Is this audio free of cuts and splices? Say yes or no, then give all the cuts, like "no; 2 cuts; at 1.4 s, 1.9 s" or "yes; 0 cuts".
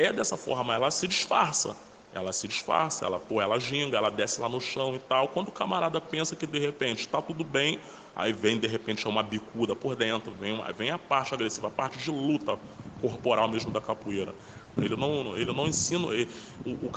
no; 2 cuts; at 2.0 s, 14.8 s